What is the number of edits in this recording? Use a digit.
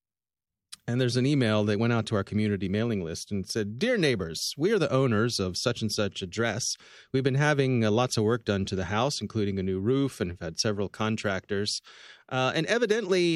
0